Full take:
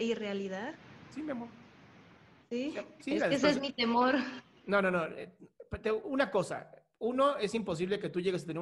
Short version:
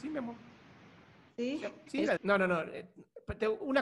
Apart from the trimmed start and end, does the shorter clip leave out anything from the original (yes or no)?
yes